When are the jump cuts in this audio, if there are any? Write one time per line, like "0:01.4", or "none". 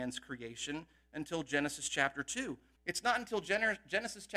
0:02.8